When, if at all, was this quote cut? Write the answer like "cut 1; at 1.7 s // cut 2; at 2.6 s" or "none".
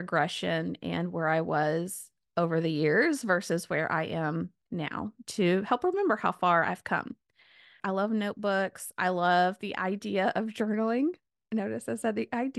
cut 1; at 7.8 s